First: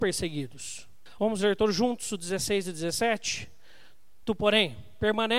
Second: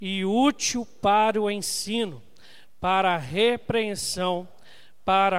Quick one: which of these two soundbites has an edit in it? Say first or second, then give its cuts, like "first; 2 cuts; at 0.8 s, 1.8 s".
first; 2 cuts; at 1.2 s, 4.2 s